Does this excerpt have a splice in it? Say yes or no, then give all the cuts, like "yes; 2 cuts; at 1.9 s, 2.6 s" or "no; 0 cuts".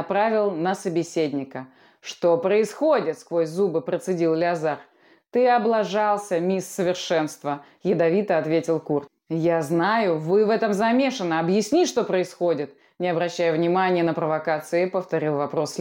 no; 0 cuts